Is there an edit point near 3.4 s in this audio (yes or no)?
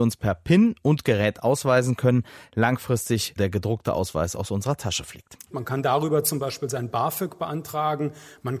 yes